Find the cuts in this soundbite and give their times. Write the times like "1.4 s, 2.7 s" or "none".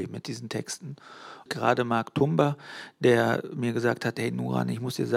1.5 s